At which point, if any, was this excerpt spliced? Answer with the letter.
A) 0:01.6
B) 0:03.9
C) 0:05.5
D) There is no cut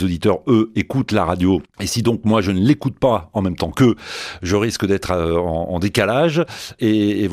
D